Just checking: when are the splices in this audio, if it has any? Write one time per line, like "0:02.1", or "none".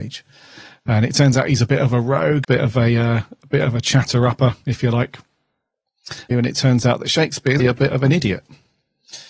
0:02.4
0:06.3
0:07.6